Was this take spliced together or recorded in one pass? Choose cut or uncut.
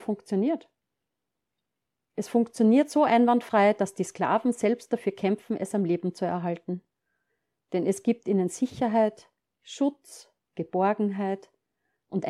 uncut